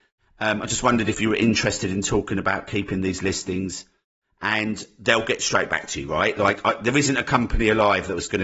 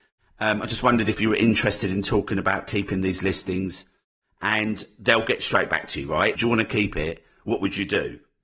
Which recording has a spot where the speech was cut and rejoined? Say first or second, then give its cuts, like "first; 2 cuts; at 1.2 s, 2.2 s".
second; 1 cut; at 6.4 s